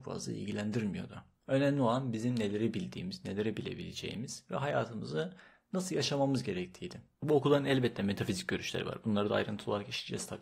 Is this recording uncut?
no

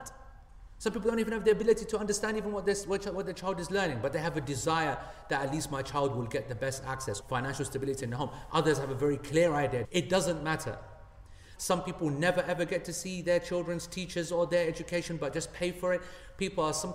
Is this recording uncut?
no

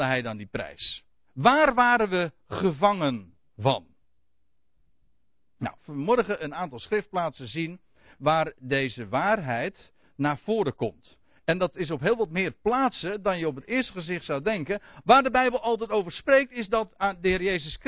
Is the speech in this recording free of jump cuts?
no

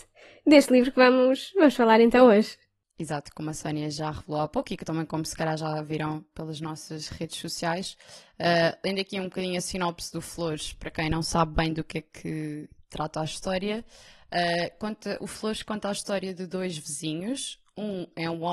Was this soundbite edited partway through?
no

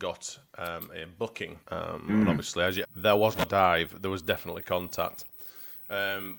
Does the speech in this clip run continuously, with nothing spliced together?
no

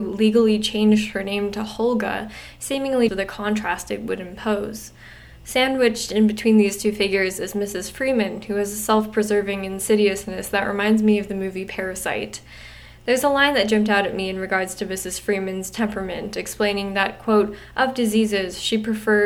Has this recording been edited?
yes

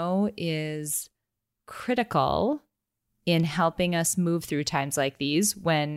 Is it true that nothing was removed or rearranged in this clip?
yes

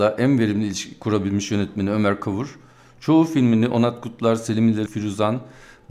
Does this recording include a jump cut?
yes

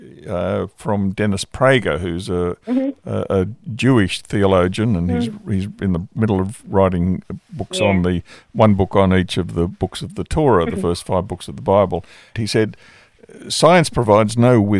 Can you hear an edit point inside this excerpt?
yes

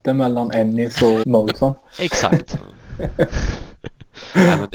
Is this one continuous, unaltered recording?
no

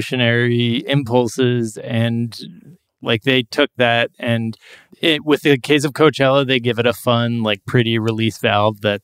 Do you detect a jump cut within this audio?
no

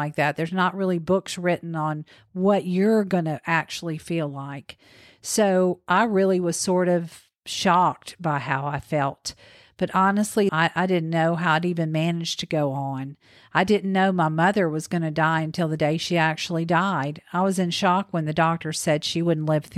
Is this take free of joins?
no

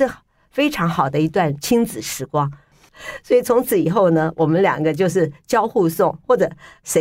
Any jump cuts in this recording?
yes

